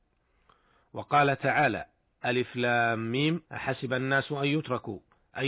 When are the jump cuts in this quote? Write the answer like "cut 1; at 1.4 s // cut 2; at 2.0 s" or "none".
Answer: cut 1; at 3.4 s